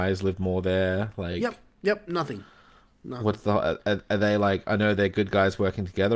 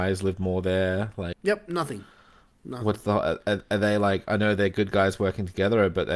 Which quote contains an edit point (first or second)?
second